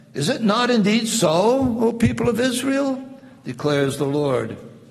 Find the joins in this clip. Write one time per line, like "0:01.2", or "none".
none